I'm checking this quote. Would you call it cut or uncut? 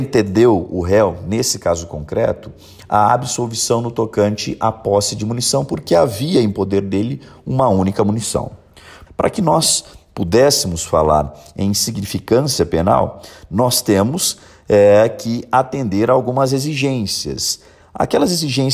cut